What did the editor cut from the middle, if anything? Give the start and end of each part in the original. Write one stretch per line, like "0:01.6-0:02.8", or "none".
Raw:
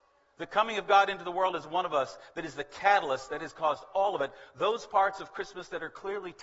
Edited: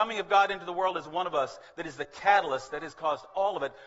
none